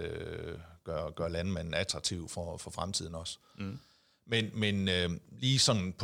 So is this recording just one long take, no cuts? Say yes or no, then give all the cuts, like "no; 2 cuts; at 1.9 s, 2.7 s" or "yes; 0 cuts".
yes; 0 cuts